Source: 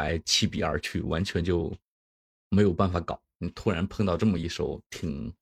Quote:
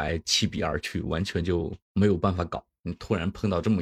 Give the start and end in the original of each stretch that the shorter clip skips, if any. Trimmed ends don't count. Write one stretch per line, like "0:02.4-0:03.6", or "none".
0:01.8-0:02.4